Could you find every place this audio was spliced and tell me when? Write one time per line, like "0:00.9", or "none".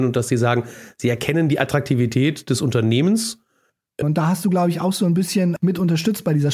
0:04.0
0:05.6